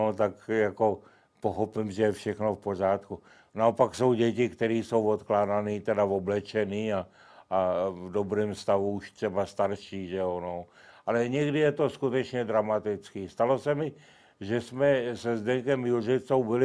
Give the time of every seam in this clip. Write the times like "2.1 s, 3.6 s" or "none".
none